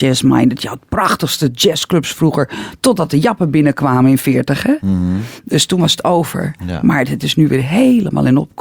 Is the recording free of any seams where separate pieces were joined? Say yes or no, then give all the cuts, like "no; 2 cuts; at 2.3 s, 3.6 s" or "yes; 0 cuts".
yes; 0 cuts